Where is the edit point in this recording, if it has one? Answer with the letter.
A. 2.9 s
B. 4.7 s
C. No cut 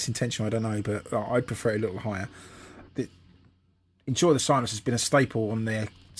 A